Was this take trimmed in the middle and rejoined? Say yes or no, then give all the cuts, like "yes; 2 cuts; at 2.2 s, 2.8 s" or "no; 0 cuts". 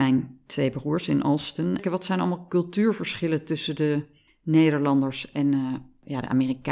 yes; 1 cut; at 1.8 s